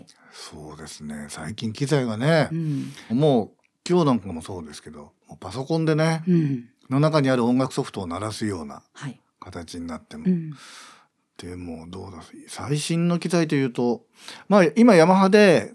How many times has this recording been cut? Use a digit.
2